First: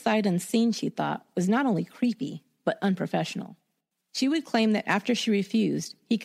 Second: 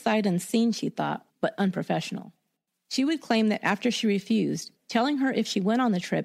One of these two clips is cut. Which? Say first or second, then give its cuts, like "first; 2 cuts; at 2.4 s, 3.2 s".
second; 2 cuts; at 1.3 s, 4.8 s